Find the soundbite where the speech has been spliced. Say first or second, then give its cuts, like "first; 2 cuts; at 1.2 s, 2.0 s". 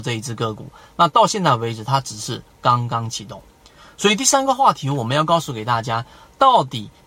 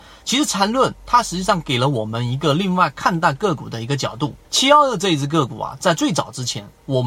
second; 1 cut; at 4.4 s